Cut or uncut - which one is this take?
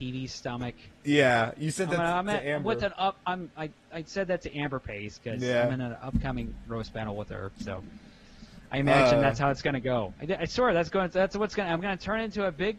uncut